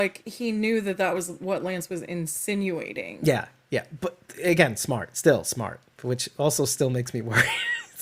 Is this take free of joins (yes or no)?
yes